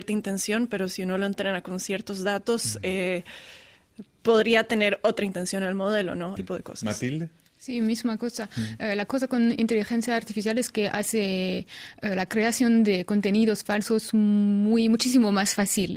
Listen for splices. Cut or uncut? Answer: cut